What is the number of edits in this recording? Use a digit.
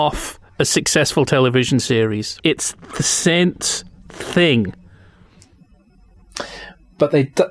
1